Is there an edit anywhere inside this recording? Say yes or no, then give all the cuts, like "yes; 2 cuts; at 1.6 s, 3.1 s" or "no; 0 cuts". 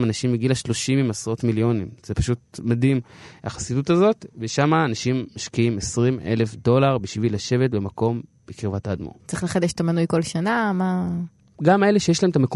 yes; 1 cut; at 9.2 s